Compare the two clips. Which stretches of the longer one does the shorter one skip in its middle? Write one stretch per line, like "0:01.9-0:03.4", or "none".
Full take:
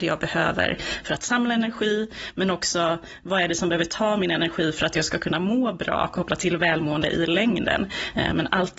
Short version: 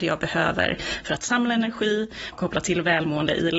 0:02.3-0:06.1